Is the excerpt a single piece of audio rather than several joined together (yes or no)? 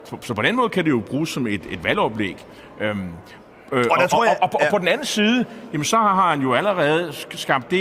yes